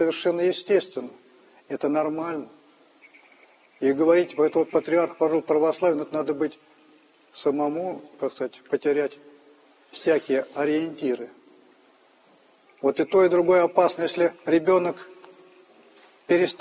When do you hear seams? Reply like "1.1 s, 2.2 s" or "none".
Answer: 12.7 s, 14.4 s